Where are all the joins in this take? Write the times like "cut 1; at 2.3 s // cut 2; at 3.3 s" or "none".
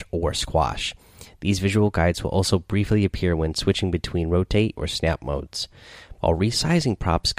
cut 1; at 4.8 s // cut 2; at 6.1 s